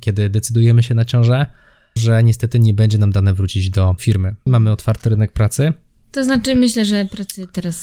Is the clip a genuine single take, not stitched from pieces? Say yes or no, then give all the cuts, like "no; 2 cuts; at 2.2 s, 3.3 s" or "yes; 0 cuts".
no; 2 cuts; at 2.0 s, 4.5 s